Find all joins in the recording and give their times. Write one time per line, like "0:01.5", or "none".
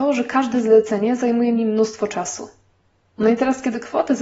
none

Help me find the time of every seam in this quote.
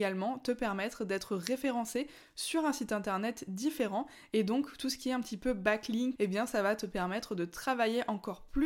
0:06.2

